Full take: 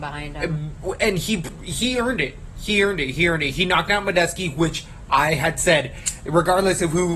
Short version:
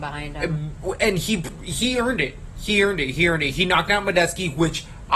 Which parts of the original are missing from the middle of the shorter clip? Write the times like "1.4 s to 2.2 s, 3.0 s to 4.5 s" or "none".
none